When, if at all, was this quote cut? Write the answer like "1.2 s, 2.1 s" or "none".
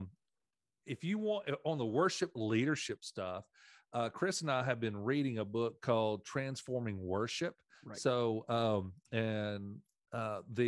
7.7 s